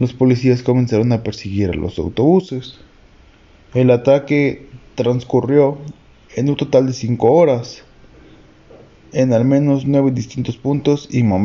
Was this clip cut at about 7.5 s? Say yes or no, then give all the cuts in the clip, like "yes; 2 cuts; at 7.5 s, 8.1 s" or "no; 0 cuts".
no; 1 cut; at 3.7 s